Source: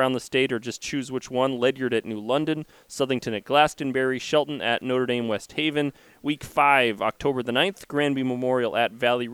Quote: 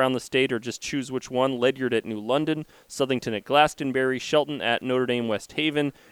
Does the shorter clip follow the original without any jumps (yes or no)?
yes